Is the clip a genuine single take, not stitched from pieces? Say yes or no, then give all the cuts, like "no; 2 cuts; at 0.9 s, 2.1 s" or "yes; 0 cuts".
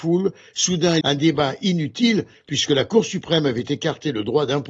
no; 1 cut; at 1.0 s